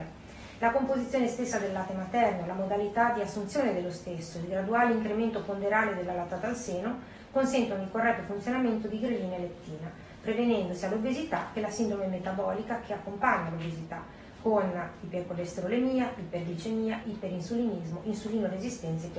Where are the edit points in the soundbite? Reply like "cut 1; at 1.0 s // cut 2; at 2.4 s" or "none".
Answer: cut 1; at 17.0 s